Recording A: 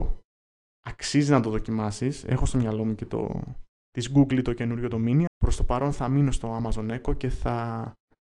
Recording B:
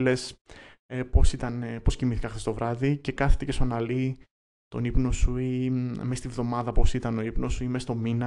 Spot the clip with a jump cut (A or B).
A